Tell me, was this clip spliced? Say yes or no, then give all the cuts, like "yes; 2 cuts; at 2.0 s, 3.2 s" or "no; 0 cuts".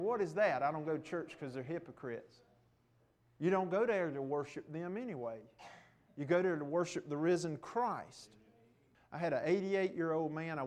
yes; 1 cut; at 8.9 s